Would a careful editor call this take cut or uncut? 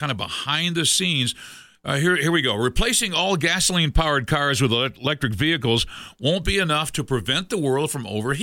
uncut